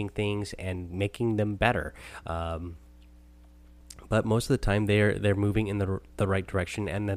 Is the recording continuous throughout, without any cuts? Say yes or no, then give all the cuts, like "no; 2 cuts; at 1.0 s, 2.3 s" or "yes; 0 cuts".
no; 1 cut; at 2.2 s